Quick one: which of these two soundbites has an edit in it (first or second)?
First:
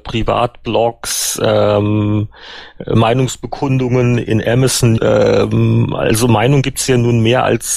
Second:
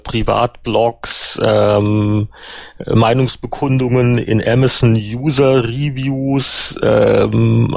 first